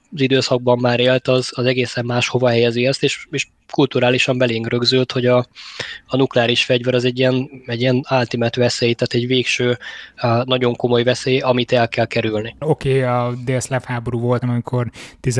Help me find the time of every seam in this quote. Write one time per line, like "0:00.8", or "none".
0:12.6
0:14.4